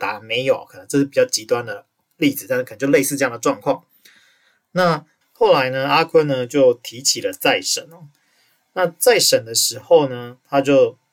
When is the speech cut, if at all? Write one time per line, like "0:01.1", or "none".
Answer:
0:05.2